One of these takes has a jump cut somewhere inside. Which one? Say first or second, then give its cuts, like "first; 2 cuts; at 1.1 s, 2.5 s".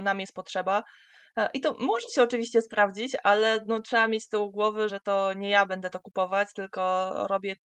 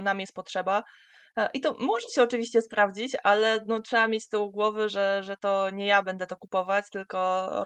first; 1 cut; at 4.9 s